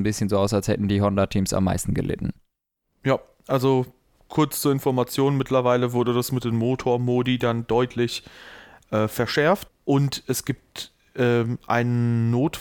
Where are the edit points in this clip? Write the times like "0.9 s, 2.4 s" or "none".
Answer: 9.7 s